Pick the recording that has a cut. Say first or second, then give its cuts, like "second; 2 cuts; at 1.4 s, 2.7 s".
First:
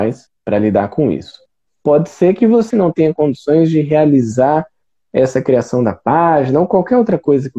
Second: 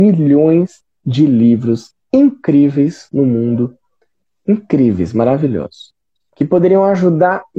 first; 2 cuts; at 1.7 s, 2.7 s